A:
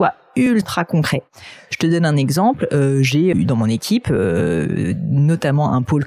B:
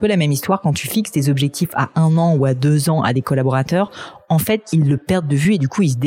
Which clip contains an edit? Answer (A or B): A